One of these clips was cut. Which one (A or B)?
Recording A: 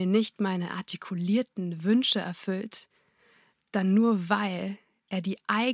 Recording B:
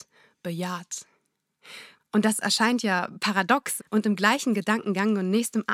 B